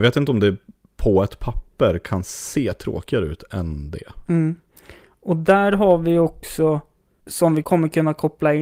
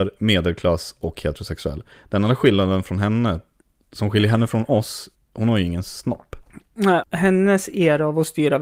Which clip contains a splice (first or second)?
second